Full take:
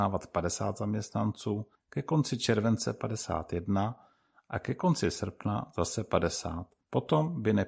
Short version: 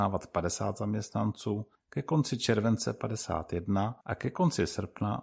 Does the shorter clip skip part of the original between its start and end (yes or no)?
yes